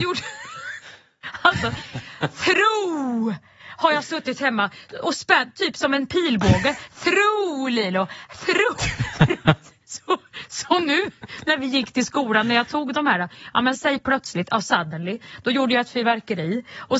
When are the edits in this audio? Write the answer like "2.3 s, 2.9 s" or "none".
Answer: none